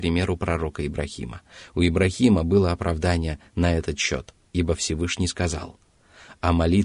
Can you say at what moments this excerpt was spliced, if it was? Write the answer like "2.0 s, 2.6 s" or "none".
none